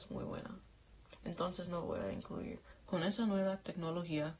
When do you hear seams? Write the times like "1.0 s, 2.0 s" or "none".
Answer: 2.7 s